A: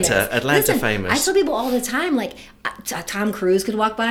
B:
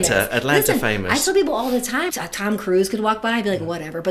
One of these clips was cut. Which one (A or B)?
B